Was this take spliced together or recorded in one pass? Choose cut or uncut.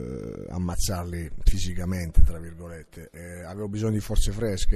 uncut